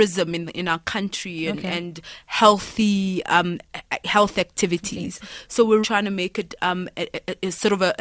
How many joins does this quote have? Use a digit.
1